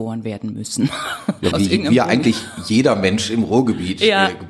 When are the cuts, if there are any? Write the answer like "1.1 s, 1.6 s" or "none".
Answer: 1.5 s